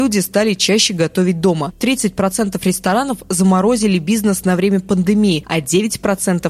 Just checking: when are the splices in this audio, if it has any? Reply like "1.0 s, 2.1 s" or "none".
none